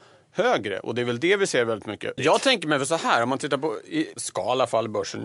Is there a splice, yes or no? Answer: yes